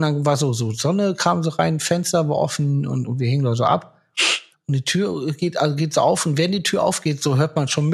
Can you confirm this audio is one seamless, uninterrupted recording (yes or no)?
no